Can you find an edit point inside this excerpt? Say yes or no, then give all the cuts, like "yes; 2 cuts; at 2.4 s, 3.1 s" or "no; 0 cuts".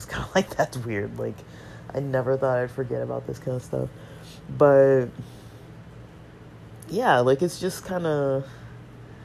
no; 0 cuts